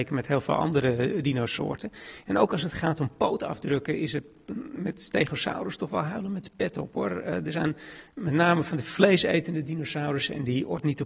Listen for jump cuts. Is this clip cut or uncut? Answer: uncut